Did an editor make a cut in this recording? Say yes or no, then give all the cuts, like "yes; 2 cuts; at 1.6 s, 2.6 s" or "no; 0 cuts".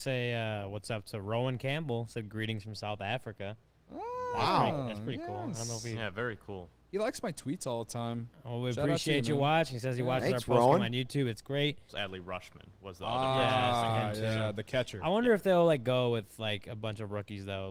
yes; 1 cut; at 11.9 s